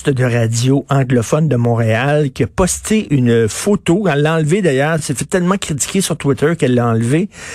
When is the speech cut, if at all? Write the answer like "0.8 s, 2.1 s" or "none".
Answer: none